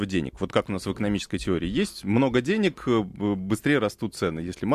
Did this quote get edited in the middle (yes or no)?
no